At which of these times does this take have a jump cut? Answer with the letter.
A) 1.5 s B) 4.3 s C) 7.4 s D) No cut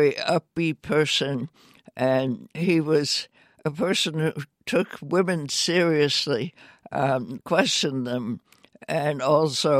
C